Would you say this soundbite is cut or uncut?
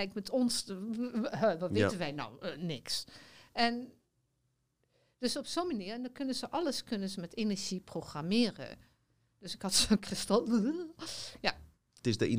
uncut